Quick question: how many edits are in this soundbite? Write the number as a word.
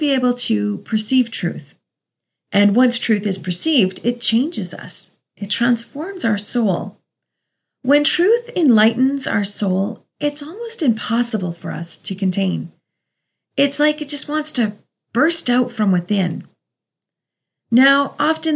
zero